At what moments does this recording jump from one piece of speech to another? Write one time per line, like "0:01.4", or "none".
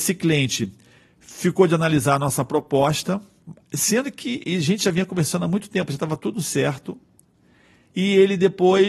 none